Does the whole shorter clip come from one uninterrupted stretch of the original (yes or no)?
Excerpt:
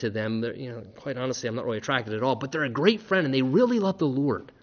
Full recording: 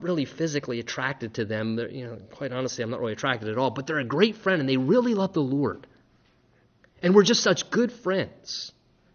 yes